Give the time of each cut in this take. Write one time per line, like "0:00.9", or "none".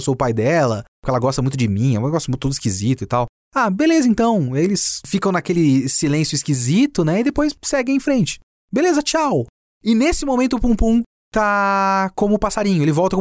none

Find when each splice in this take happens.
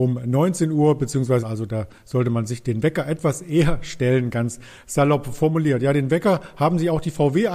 0:01.4

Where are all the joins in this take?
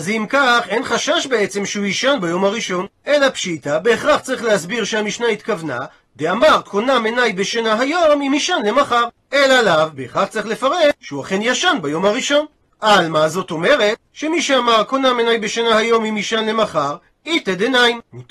0:09.2
0:11.0

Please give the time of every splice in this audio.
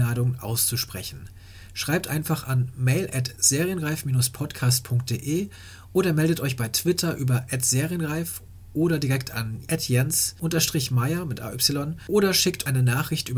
none

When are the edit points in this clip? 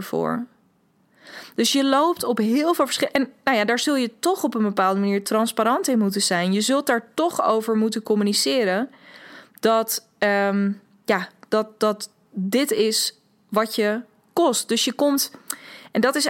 none

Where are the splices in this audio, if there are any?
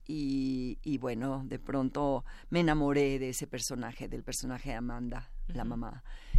none

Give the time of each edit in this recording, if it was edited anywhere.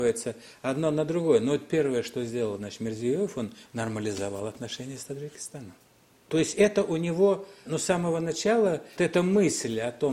0:06.2
0:07.7
0:09.0

